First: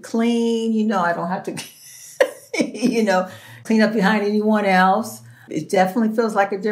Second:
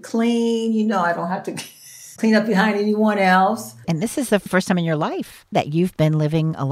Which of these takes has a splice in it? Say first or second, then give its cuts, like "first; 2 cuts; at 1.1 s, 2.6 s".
second; 2 cuts; at 2.2 s, 3.8 s